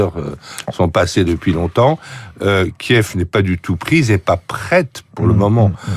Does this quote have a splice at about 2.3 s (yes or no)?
no